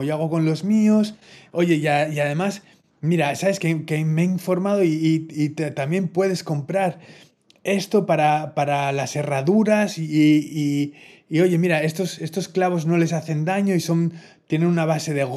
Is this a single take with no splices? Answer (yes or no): yes